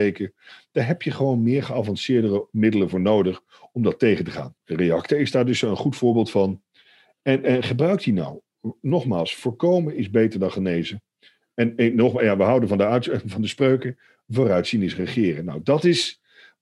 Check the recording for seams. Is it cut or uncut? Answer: cut